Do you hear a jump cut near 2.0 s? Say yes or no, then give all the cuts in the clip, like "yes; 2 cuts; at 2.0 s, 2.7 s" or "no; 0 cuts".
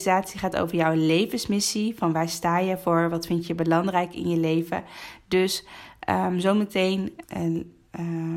no; 1 cut; at 7.2 s